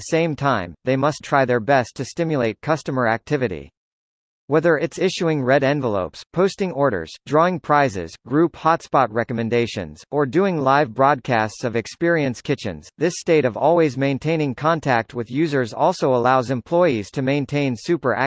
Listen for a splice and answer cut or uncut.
cut